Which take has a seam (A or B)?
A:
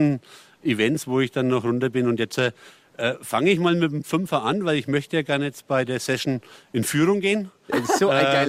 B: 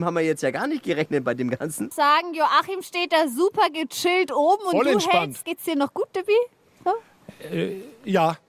B